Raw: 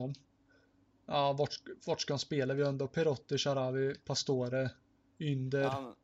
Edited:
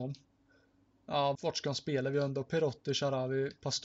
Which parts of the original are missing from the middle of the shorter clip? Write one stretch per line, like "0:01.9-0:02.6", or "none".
0:01.4-0:01.8